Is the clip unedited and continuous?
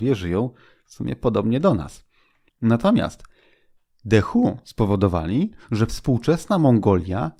no; 1 cut; at 2.5 s

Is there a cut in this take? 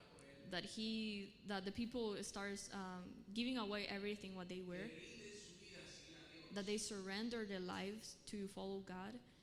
no; 0 cuts

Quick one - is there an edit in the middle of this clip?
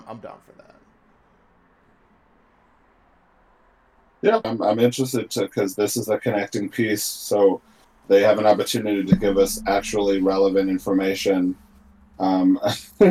yes; 1 cut; at 4.4 s

